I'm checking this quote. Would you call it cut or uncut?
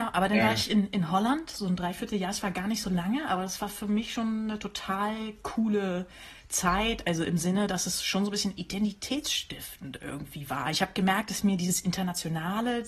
uncut